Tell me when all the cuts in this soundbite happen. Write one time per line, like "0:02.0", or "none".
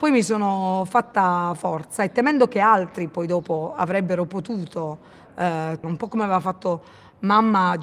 0:05.8